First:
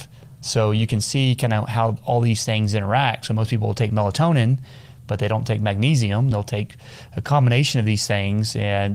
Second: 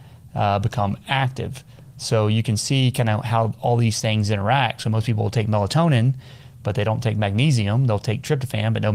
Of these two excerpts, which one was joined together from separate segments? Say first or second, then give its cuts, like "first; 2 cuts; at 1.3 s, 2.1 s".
first; 1 cut; at 6.3 s